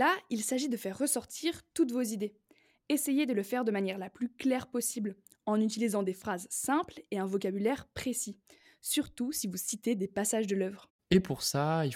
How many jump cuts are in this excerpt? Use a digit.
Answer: 0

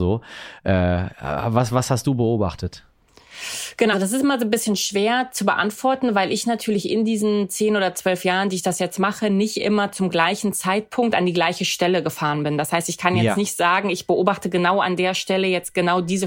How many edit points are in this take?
1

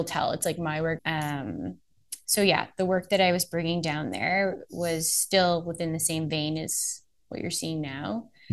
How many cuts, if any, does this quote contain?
1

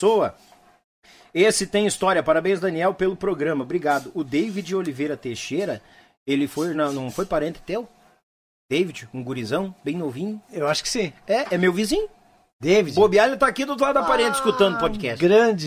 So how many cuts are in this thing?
0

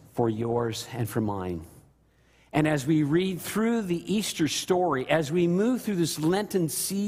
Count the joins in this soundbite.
0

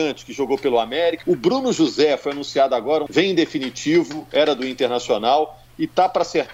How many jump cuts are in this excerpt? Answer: 2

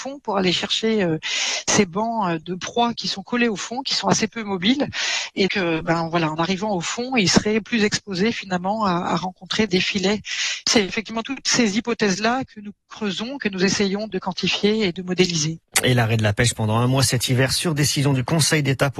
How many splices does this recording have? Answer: 1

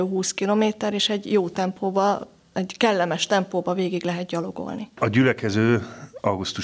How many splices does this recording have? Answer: 1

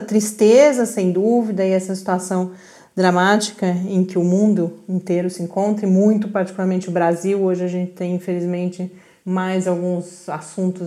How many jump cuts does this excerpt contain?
0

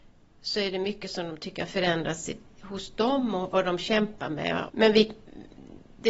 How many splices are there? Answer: 1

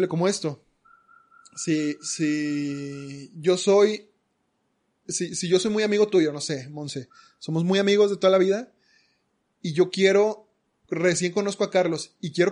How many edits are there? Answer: 1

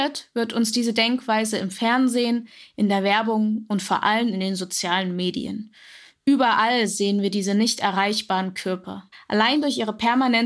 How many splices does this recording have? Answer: 1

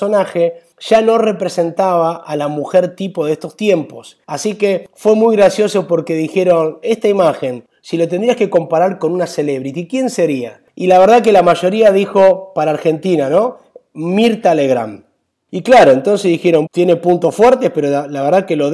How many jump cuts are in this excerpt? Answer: 2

